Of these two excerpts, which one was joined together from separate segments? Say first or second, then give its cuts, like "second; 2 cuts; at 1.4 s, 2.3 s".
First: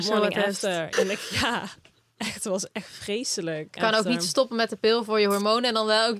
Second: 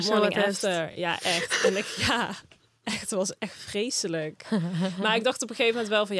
first; 2 cuts; at 0.9 s, 3.8 s